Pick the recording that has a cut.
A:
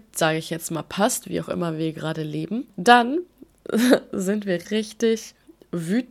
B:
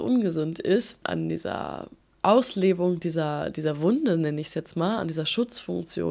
A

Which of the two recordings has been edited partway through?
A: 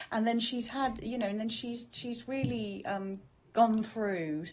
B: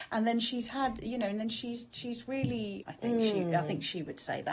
B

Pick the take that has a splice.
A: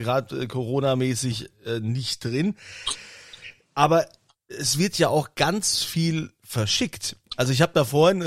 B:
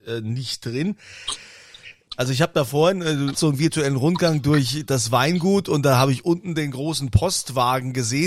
B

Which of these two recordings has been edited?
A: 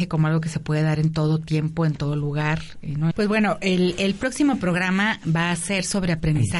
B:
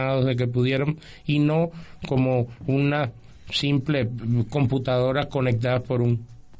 A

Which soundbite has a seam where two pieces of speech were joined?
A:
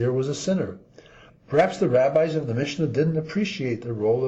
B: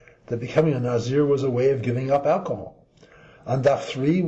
A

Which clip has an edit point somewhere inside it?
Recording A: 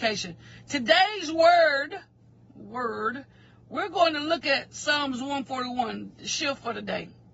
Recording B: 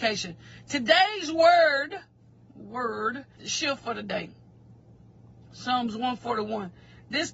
B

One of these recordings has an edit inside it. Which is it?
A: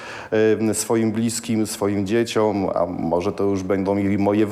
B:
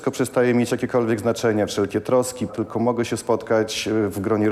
B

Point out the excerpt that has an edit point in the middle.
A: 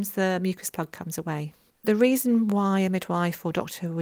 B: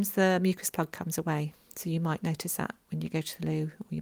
A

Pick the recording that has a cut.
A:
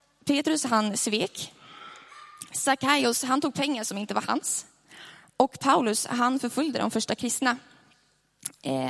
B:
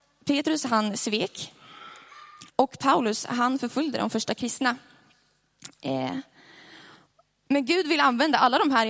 B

